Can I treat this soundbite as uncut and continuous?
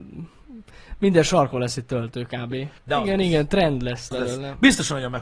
no; 2 cuts; at 2.8 s, 4.1 s

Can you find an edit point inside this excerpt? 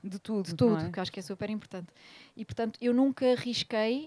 no; 0 cuts

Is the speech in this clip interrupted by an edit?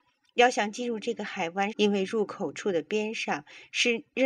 yes; 1 cut; at 1.7 s

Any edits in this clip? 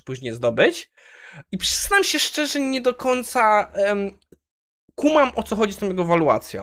yes; 1 cut; at 1.5 s

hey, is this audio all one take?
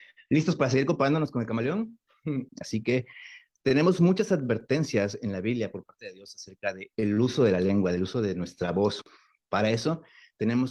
no; 2 cuts; at 2.5 s, 6.9 s

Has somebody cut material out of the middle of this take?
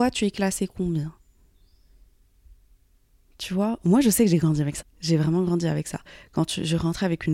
yes; 1 cut; at 4.8 s

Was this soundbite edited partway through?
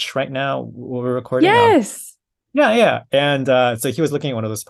no; 0 cuts

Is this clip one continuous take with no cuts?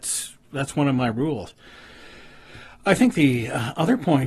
yes; 0 cuts

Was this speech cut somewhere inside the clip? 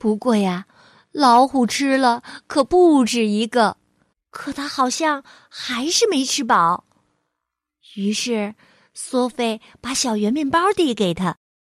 yes; 1 cut; at 4.1 s

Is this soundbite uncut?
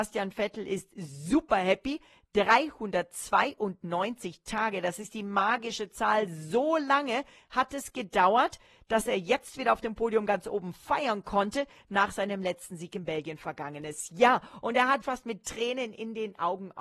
no; 1 cut; at 15.0 s

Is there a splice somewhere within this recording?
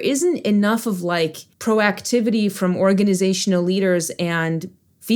yes; 1 cut; at 1.5 s

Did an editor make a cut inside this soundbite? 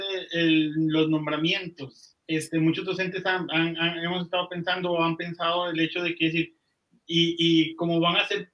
yes; 1 cut; at 2.2 s

